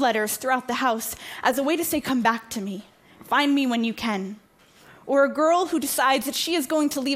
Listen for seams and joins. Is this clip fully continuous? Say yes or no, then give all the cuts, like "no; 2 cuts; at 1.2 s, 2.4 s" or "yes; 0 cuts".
yes; 0 cuts